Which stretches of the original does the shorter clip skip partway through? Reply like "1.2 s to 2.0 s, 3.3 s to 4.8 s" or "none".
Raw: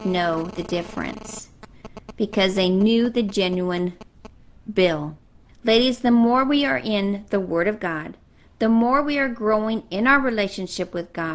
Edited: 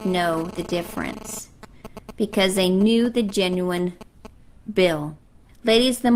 none